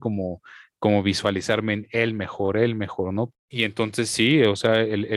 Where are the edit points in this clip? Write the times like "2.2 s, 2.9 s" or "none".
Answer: 3.3 s